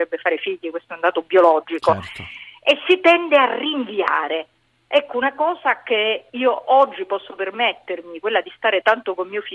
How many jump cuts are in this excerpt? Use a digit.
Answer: 0